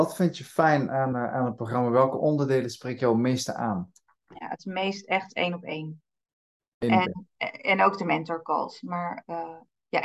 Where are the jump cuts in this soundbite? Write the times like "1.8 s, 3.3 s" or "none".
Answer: 1.1 s